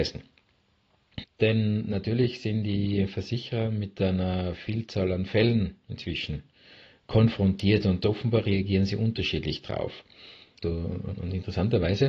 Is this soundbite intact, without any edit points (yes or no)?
no